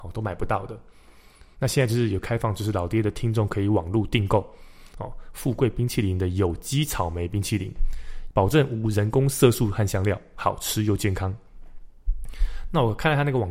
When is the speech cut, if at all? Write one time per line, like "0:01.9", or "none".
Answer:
0:08.3